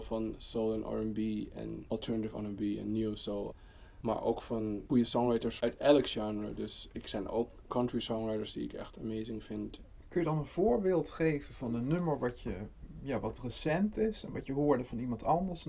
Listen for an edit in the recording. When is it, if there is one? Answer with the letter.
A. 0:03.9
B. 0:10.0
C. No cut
B